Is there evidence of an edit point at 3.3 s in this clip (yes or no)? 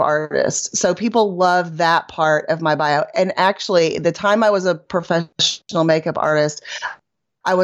no